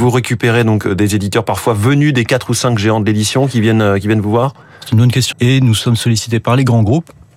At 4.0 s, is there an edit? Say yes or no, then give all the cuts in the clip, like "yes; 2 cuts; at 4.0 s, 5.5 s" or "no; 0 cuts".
no; 1 cut; at 5.3 s